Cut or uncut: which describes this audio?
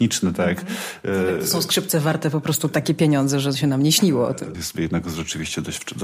cut